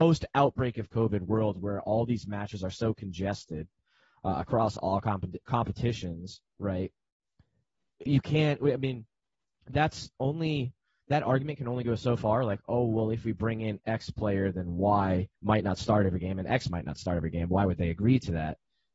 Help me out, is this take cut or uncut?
cut